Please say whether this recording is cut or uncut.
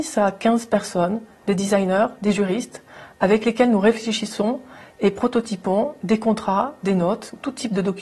uncut